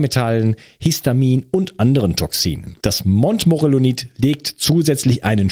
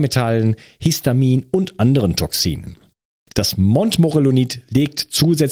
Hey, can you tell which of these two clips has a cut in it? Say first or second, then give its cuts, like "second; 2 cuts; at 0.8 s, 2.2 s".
first; 1 cut; at 2.8 s